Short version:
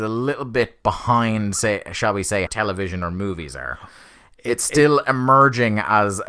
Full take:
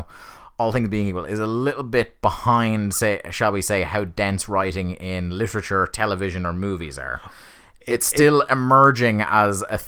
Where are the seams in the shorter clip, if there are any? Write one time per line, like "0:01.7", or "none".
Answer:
0:02.5